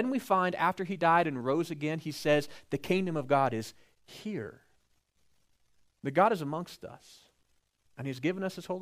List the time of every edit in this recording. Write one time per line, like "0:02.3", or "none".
0:07.9